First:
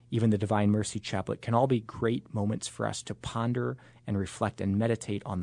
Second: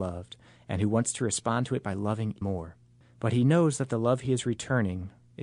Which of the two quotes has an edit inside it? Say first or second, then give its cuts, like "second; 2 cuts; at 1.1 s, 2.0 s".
second; 1 cut; at 2.4 s